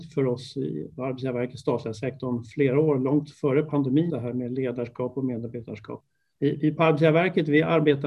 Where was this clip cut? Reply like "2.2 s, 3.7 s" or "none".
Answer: 4.1 s